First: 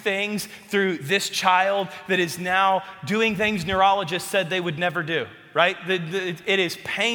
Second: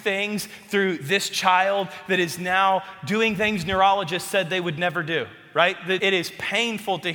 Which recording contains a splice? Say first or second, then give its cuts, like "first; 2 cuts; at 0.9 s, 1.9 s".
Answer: second; 1 cut; at 6.0 s